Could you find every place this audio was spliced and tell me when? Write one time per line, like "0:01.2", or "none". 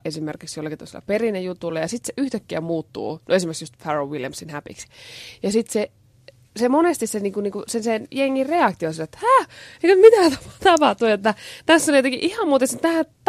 none